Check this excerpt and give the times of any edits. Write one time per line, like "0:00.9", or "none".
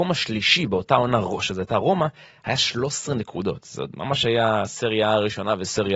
none